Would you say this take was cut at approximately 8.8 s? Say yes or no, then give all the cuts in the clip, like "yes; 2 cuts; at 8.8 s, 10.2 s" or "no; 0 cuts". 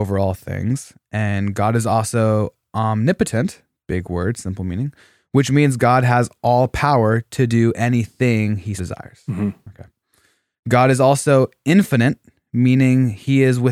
yes; 1 cut; at 8.8 s